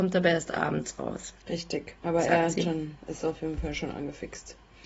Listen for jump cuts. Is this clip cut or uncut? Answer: uncut